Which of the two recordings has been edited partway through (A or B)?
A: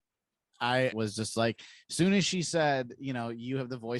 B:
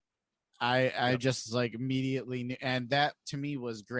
A